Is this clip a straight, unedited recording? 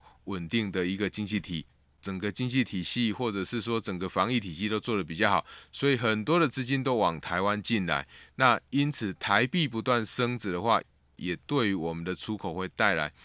yes; 0 cuts

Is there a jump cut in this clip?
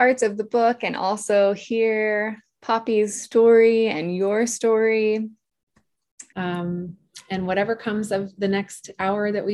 yes; 1 cut; at 6.3 s

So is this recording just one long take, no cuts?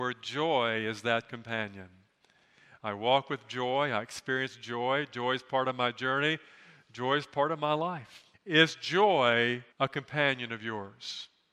no; 2 cuts; at 8.3 s, 9.7 s

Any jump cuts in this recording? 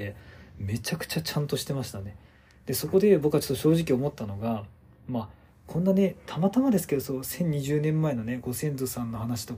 no; 0 cuts

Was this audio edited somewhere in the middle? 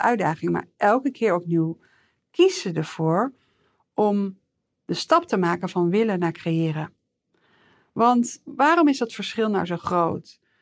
no; 0 cuts

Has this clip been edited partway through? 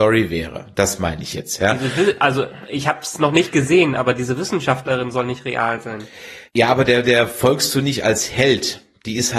yes; 1 cut; at 6.5 s

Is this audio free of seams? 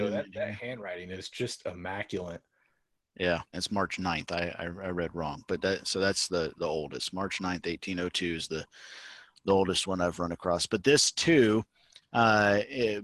no; 1 cut; at 3.5 s

